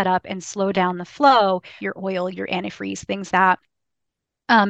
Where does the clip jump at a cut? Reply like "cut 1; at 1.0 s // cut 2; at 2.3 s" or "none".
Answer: cut 1; at 1.8 s // cut 2; at 3.3 s